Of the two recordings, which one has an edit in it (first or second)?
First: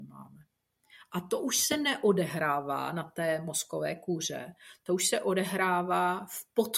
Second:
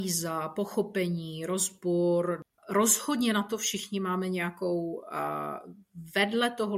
second